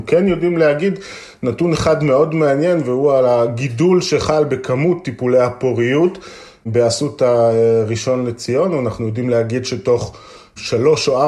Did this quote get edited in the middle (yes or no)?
no